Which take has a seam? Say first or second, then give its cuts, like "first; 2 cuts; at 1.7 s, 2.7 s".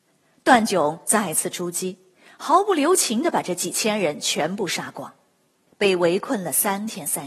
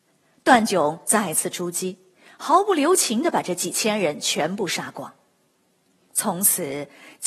first; 1 cut; at 5.7 s